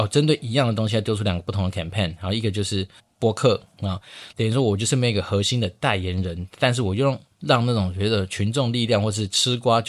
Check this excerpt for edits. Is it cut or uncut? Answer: cut